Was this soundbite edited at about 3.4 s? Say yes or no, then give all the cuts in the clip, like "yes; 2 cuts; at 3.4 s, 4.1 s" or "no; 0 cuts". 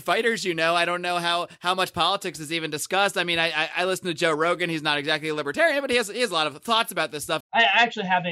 no; 1 cut; at 7.4 s